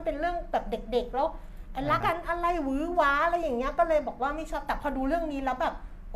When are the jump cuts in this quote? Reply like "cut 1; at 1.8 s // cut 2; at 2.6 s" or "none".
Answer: cut 1; at 2.0 s